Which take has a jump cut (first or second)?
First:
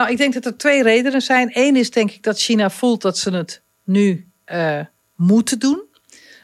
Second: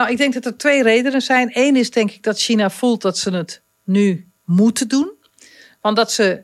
second